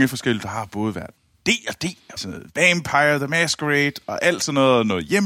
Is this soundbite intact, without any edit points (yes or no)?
no